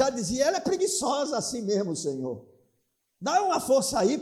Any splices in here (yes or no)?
no